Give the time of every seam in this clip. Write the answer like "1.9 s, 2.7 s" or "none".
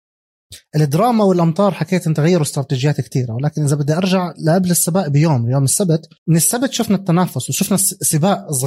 6.2 s